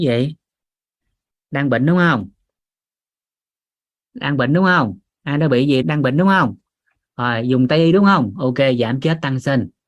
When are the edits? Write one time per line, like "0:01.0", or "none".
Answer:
0:05.8